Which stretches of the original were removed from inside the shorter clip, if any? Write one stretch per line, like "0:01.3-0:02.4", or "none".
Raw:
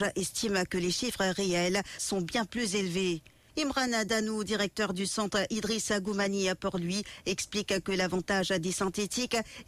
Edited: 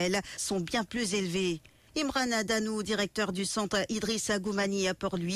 none